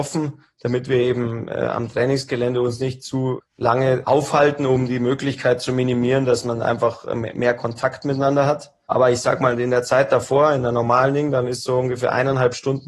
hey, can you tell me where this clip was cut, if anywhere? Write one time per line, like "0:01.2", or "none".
none